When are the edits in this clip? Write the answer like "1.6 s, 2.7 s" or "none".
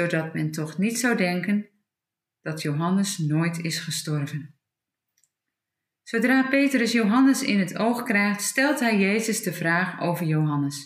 none